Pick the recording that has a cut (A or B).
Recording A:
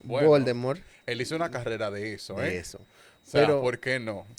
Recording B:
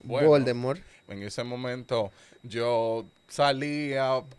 B